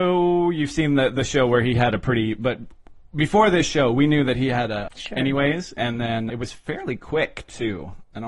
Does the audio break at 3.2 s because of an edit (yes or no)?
no